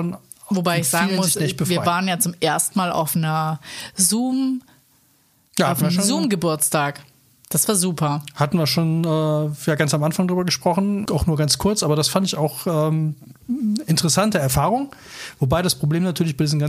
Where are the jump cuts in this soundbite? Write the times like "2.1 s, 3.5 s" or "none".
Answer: 11.1 s